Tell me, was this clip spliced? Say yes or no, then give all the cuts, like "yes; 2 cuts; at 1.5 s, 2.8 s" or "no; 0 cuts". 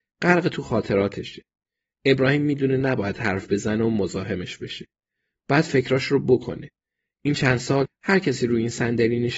no; 0 cuts